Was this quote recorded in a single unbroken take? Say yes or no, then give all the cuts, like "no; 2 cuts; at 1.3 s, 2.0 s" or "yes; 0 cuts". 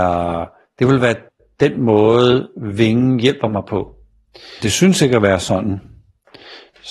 no; 1 cut; at 4.6 s